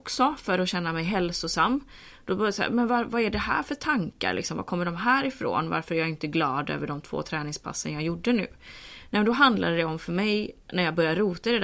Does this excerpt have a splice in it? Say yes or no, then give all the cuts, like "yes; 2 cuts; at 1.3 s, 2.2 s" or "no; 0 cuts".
no; 0 cuts